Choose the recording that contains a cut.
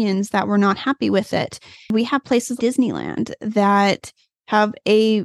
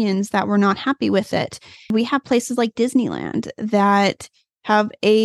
first; 1 cut; at 2.6 s

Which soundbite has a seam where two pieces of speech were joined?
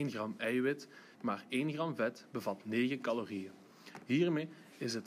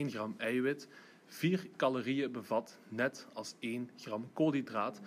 first; 1 cut; at 1.1 s

